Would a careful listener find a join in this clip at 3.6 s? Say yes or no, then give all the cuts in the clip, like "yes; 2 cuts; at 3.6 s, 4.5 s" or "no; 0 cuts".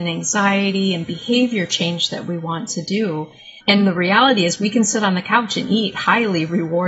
yes; 1 cut; at 3.6 s